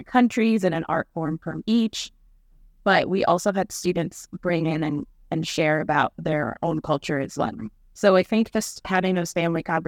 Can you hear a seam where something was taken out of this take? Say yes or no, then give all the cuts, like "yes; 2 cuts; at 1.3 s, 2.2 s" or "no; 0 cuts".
no; 0 cuts